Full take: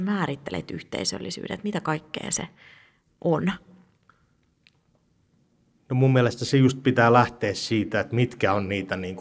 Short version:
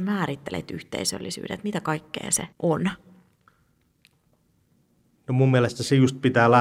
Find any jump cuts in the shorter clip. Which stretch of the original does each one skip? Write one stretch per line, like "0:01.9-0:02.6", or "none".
0:02.5-0:03.1